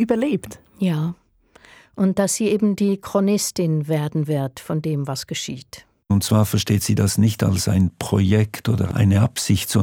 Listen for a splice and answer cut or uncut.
uncut